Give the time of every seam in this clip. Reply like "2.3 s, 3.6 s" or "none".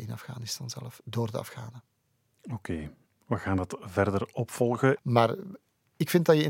5.0 s